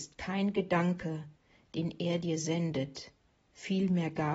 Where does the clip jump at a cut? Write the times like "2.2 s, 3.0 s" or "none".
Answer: none